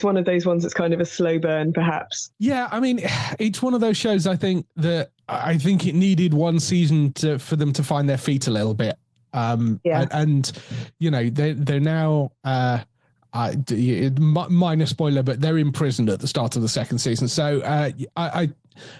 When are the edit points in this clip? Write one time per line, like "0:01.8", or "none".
none